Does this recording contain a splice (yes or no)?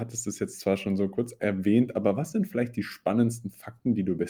no